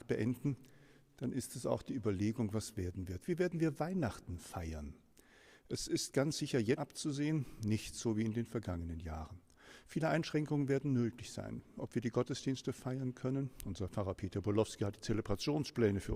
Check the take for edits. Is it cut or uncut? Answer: cut